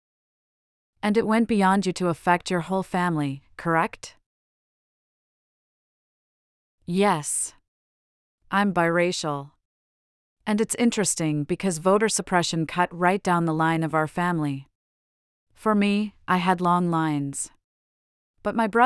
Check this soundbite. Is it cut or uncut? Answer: uncut